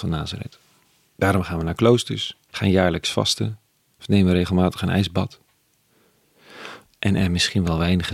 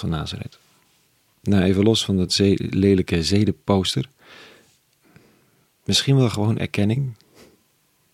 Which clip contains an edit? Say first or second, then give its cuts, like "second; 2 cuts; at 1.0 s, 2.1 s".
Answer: first; 3 cuts; at 1.1 s, 2.5 s, 6.8 s